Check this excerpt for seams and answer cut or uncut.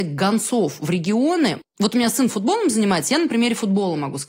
cut